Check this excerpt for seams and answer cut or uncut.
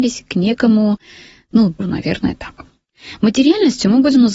cut